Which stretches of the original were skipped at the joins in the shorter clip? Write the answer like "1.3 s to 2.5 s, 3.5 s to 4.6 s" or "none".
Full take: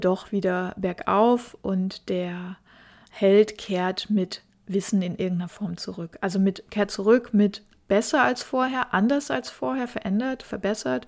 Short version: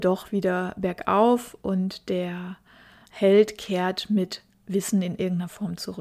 none